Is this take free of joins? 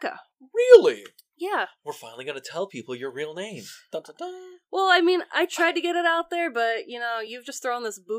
yes; 0 cuts

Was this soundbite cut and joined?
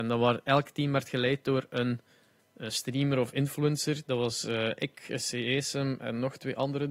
no; 0 cuts

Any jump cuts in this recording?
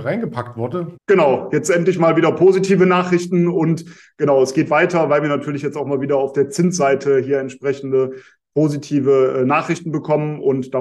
yes; 1 cut; at 0.9 s

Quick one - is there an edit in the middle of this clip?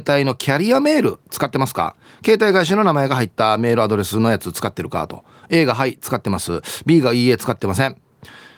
no; 0 cuts

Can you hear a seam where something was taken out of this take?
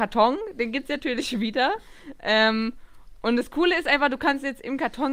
no; 0 cuts

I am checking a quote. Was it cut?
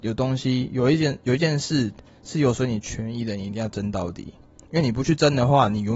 no; 0 cuts

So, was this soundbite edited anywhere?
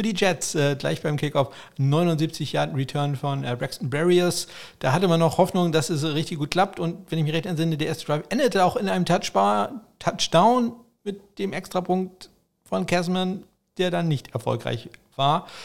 no; 0 cuts

